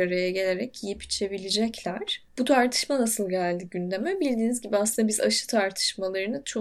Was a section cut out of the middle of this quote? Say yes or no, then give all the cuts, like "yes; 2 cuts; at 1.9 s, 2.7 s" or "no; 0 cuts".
no; 0 cuts